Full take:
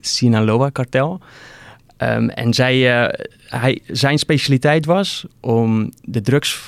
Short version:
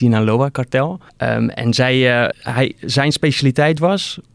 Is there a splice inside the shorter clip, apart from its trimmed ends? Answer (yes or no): yes